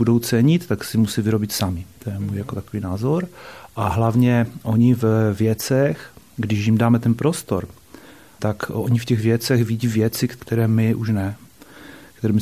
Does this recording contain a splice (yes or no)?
no